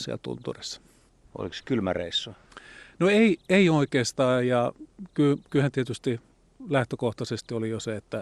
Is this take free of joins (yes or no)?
yes